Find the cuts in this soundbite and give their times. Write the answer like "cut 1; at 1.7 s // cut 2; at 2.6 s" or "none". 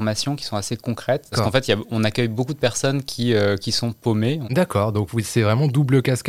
cut 1; at 1.3 s // cut 2; at 4.4 s